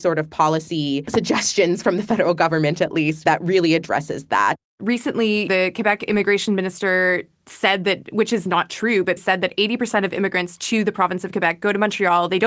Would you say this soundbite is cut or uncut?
cut